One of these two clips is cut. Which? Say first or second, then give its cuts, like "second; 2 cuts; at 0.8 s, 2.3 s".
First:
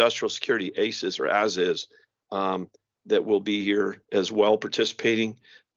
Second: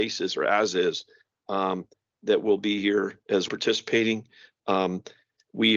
second; 1 cut; at 3.5 s